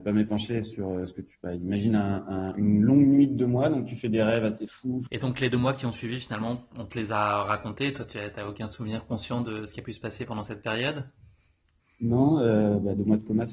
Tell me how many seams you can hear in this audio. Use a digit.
1